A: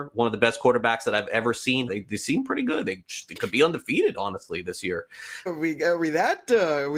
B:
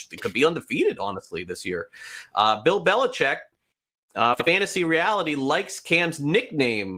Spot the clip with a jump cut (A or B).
A